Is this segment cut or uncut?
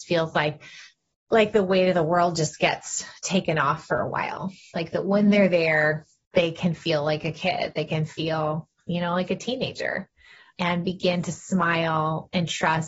uncut